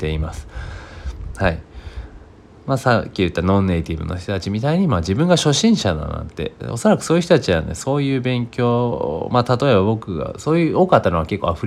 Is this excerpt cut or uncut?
cut